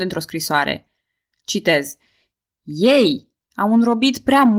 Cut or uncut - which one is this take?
uncut